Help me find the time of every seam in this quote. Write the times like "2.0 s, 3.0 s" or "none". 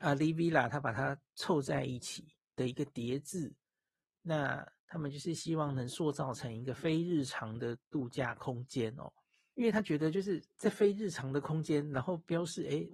9.5 s